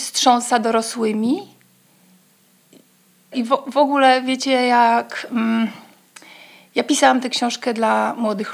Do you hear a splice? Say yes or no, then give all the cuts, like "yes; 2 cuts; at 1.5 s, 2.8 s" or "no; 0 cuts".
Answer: yes; 1 cut; at 3.3 s